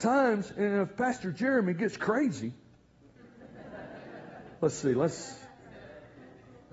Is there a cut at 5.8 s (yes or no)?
no